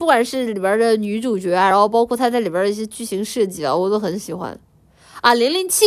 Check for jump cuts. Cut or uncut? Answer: uncut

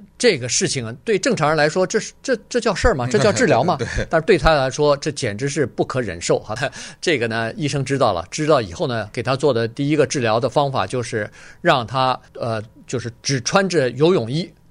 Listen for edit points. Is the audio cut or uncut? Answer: cut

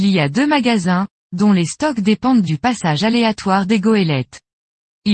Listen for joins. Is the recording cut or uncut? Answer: uncut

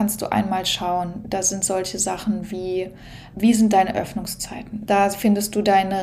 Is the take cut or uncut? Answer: cut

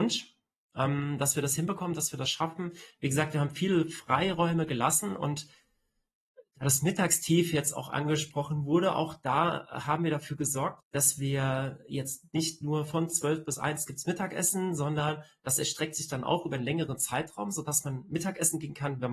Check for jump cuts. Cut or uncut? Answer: cut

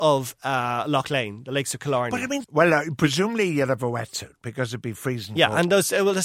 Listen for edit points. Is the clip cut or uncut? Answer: cut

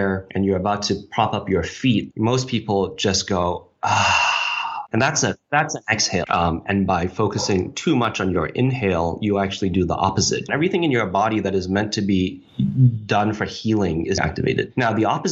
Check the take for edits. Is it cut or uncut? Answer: cut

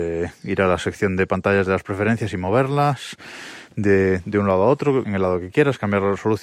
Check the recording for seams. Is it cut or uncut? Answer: cut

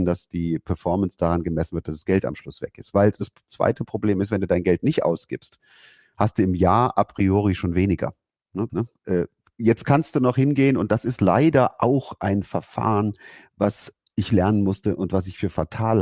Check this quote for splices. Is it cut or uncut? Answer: cut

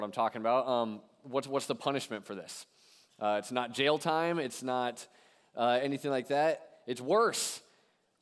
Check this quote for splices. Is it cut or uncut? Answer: uncut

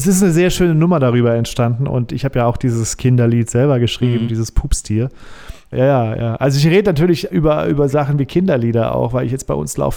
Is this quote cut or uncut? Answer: cut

